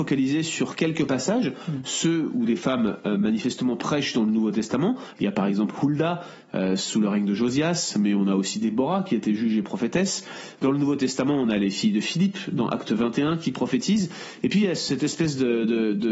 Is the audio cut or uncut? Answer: cut